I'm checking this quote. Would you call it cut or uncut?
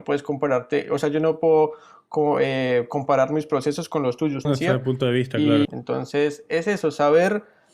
cut